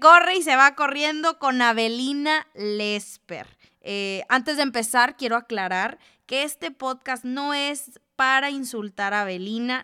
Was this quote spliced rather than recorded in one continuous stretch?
yes; 1 cut; at 3.7 s

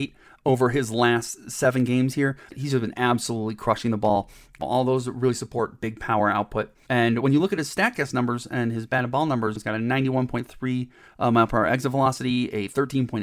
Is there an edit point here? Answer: yes; 3 cuts; at 2.5 s, 4.6 s, 6.9 s

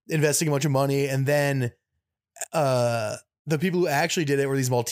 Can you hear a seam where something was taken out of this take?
no; 0 cuts

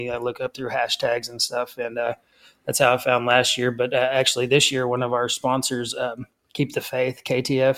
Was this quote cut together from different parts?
no; 0 cuts

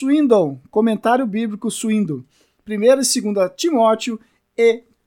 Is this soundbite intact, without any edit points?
yes; 0 cuts

